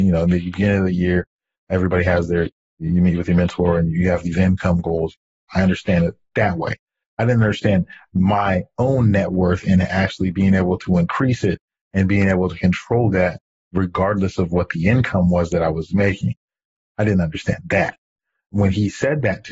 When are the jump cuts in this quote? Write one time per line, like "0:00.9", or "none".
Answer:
0:05.5